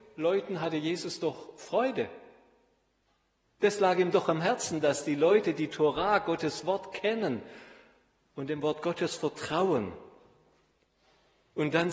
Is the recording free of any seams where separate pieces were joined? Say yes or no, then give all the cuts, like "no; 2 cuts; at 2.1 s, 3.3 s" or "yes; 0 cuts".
no; 1 cut; at 3.4 s